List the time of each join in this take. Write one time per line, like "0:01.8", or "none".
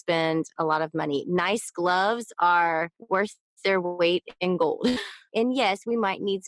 0:05.3